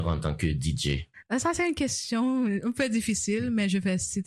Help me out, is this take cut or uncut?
uncut